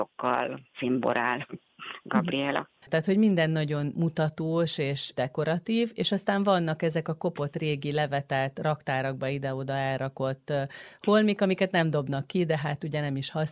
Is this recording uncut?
no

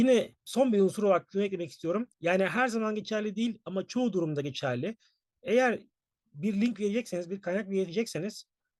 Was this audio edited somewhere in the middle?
yes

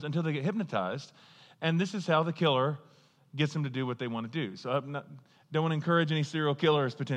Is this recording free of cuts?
yes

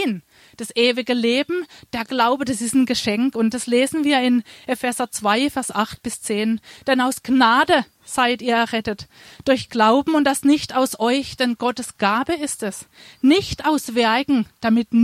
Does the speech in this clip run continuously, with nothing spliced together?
yes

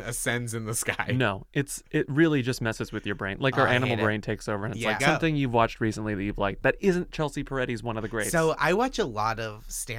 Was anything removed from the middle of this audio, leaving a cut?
yes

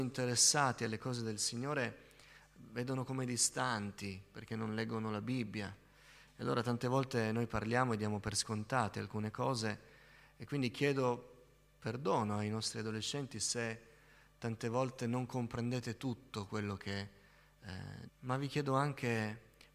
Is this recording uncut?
no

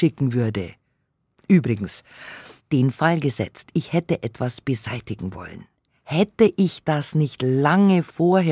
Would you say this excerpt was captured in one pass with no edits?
yes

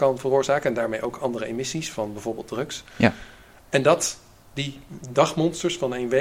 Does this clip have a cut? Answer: no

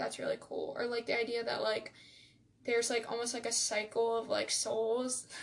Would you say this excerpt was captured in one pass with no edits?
yes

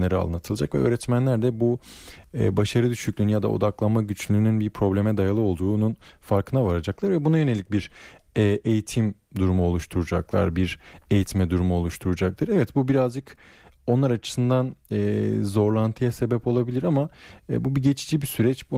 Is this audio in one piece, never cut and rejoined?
yes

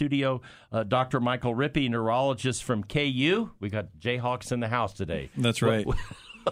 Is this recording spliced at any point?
no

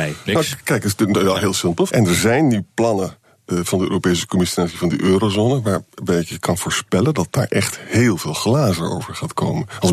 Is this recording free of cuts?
no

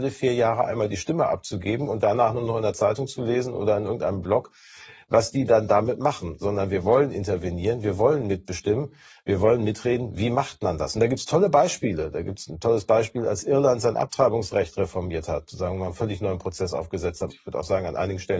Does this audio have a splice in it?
yes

